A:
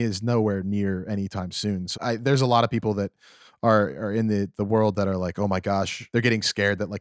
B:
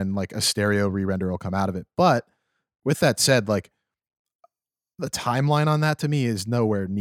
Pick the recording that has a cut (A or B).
A